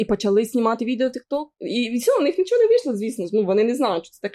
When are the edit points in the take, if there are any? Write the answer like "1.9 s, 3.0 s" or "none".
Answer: none